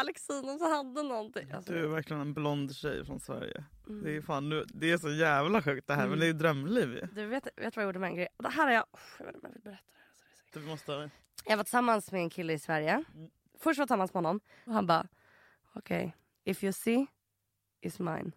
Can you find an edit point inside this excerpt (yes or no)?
yes